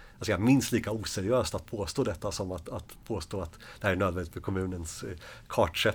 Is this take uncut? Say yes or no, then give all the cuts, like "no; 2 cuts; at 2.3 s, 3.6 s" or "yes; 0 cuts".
yes; 0 cuts